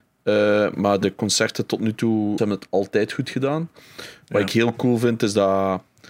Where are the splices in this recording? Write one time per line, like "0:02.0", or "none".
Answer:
0:02.4